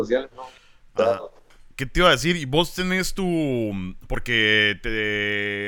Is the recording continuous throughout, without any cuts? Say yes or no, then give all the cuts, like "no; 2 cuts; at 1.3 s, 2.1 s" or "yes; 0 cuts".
yes; 0 cuts